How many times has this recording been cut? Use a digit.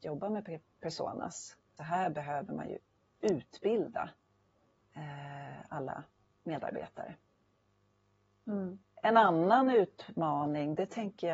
2